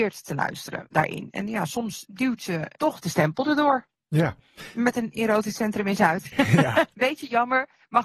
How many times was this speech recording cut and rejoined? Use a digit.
1